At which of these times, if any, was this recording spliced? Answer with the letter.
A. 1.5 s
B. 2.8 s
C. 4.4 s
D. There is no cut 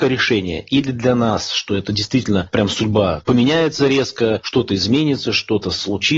D